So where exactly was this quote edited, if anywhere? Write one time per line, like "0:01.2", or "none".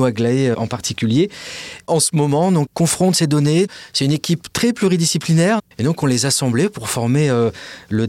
0:02.7
0:05.7